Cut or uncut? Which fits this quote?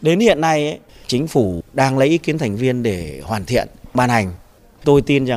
uncut